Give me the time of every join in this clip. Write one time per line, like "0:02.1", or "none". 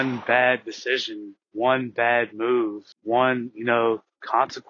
0:01.4
0:02.9